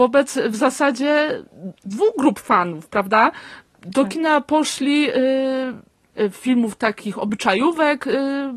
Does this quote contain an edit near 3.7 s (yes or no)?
no